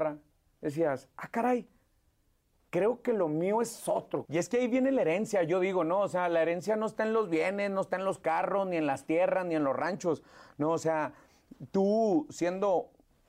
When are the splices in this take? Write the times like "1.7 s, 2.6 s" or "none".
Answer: 4.2 s